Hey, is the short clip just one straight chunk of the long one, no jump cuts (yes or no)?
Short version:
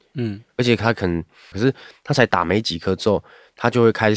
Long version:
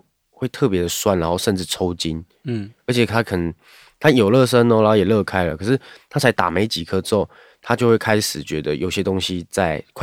no